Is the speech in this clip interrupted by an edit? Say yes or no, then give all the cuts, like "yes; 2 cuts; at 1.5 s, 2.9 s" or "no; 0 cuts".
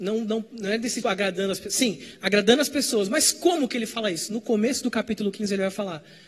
yes; 1 cut; at 1.0 s